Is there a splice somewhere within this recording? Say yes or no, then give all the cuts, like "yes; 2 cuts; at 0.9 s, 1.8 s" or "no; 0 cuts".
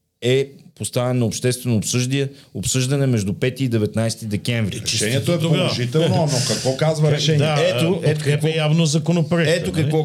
no; 0 cuts